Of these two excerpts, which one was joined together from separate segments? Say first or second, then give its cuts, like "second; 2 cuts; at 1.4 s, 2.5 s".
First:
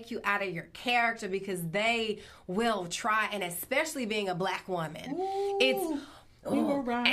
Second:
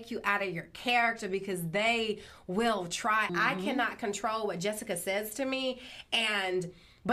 second; 1 cut; at 3.3 s